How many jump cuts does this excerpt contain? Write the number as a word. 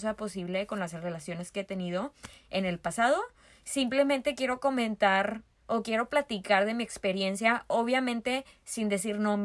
zero